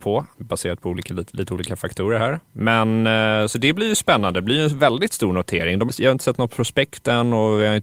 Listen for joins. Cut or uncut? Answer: uncut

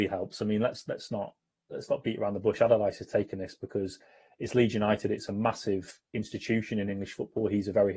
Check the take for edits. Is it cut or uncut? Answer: uncut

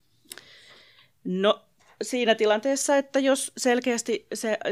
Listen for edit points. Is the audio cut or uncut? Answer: uncut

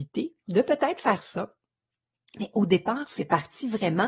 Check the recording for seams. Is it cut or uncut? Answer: uncut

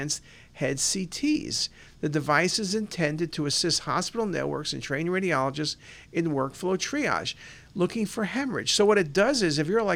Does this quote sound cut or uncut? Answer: uncut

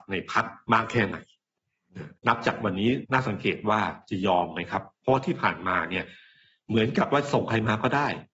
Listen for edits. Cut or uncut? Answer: cut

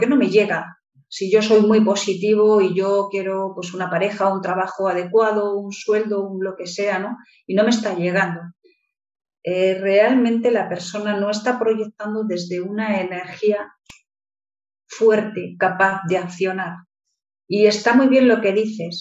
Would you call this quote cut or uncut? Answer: uncut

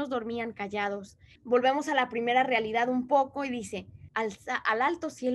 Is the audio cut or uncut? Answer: cut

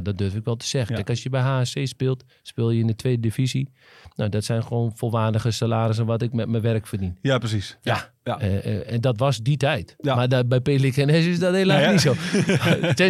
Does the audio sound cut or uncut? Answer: uncut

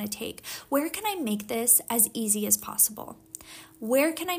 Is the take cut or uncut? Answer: uncut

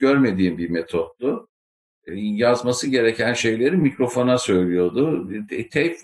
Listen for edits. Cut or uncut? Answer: cut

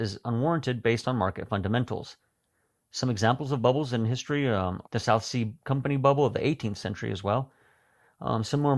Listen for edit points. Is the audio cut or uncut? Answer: cut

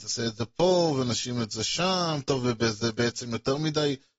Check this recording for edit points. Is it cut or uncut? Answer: uncut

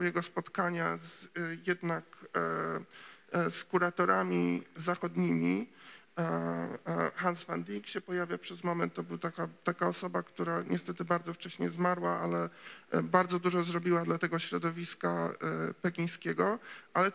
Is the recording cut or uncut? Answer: uncut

